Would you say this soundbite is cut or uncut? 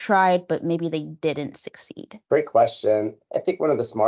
uncut